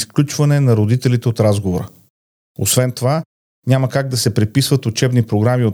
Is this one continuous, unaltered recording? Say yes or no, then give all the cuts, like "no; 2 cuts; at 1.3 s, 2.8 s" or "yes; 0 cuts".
yes; 0 cuts